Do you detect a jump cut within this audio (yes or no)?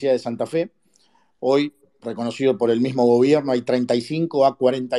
no